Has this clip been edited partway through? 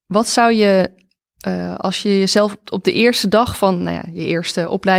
no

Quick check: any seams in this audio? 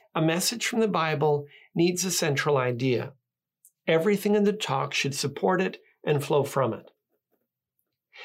no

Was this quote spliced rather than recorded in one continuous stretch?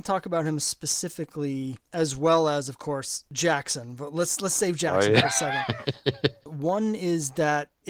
yes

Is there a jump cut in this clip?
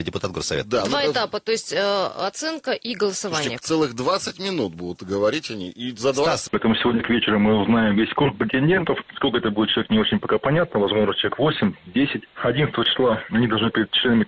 yes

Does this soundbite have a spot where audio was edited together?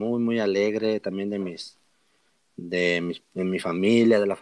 no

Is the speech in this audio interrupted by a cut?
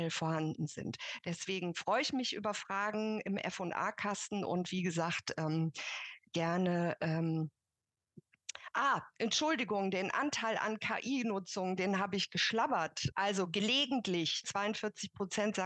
yes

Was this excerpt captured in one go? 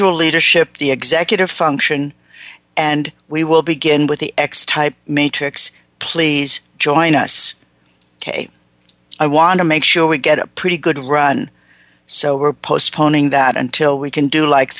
yes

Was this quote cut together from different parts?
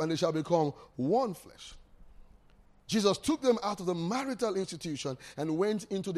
no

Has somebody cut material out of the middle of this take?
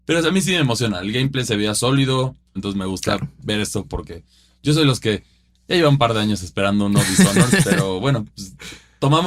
yes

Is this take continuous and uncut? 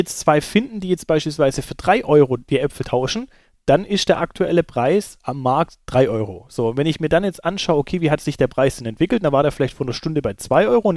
yes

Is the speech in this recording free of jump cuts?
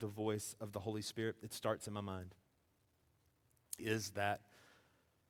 no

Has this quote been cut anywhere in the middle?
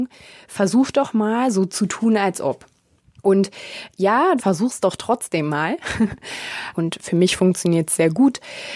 yes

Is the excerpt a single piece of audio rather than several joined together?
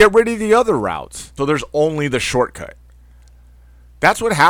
no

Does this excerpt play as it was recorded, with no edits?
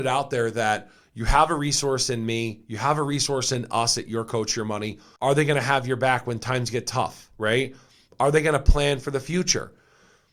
no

